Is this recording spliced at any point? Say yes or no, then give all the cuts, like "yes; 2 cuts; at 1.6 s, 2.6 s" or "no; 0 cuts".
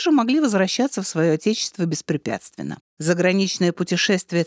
yes; 1 cut; at 2.9 s